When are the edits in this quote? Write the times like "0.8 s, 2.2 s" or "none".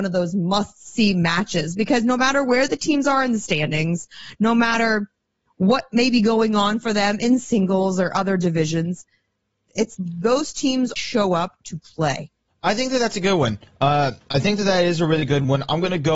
9.9 s, 11.0 s, 12.5 s